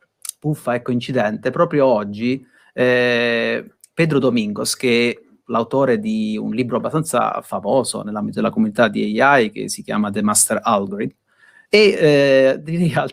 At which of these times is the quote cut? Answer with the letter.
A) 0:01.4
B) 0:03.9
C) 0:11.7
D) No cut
C